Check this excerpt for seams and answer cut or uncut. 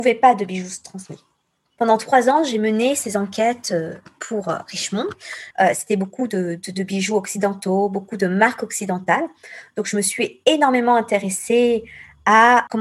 cut